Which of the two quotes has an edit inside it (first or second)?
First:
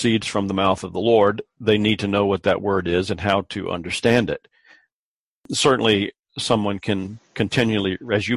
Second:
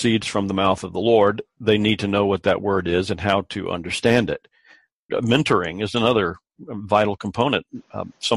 second